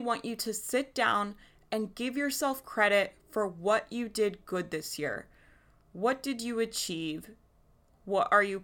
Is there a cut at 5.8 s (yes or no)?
no